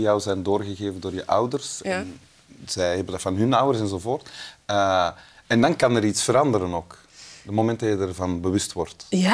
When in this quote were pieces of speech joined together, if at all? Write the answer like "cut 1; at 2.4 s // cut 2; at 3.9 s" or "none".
none